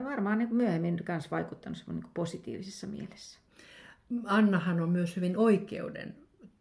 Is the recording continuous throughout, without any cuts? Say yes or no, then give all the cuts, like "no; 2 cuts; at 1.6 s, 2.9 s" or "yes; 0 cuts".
yes; 0 cuts